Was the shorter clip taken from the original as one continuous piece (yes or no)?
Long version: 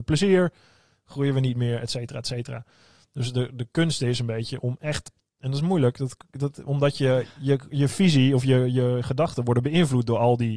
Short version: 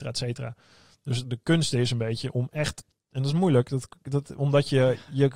no